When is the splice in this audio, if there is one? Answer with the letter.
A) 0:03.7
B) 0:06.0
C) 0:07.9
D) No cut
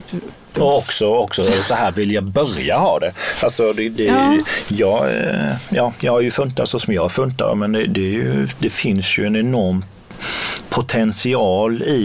D